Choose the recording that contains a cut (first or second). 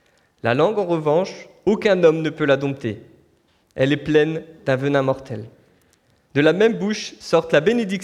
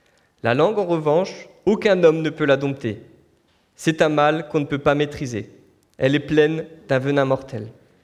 first